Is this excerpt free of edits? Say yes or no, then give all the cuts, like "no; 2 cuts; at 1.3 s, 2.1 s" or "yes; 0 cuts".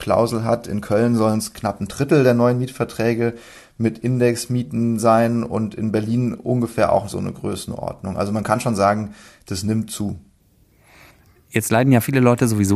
yes; 0 cuts